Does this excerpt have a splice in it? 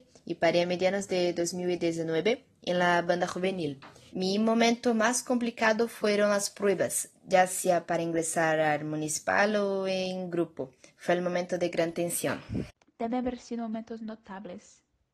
yes; 2 cuts; at 4.1 s, 7.1 s

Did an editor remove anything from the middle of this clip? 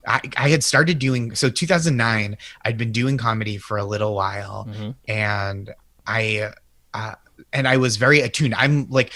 no; 0 cuts

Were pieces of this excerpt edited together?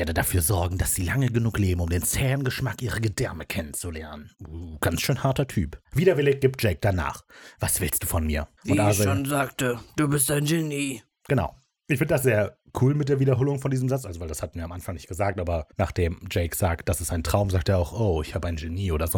no; 0 cuts

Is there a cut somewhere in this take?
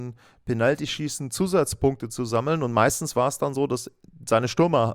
no; 0 cuts

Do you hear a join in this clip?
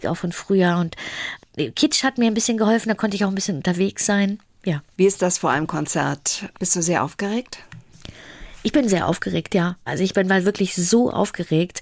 yes; 2 cuts; at 6.5 s, 9.9 s

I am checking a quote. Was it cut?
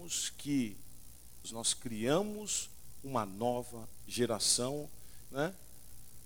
yes; 2 cuts; at 1.4 s, 5.3 s

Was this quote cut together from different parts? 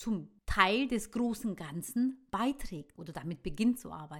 yes; 1 cut; at 2.9 s

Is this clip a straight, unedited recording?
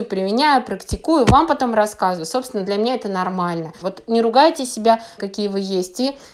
no; 2 cuts; at 3.8 s, 5.2 s

